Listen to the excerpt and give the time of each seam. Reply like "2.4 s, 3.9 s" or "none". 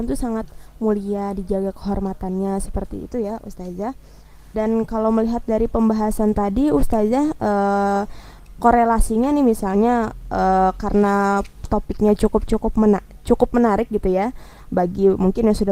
4.5 s